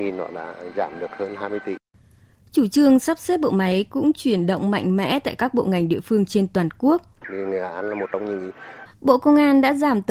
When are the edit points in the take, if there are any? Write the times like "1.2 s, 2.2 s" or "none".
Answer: 7.2 s, 8.9 s